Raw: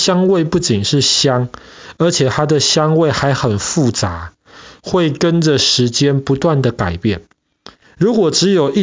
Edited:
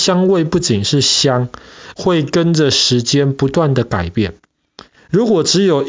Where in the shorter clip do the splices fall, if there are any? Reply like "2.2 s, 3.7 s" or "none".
1.9 s